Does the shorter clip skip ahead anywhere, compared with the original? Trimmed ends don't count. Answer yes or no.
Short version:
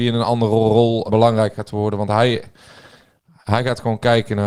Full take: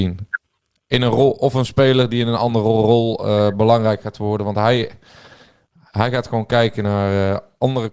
yes